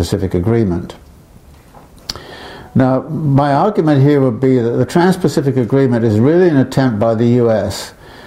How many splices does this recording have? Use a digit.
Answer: 0